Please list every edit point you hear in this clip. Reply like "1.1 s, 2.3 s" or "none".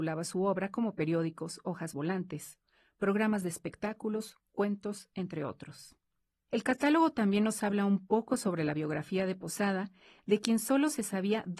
none